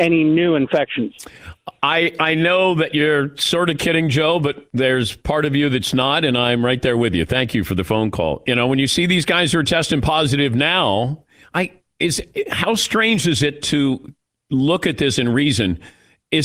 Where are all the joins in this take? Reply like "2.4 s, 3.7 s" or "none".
8.4 s